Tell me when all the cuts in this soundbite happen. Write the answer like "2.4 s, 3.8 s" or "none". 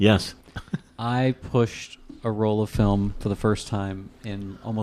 none